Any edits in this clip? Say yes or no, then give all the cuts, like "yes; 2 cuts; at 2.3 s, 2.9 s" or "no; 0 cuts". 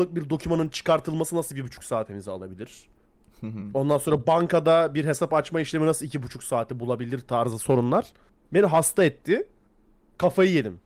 no; 0 cuts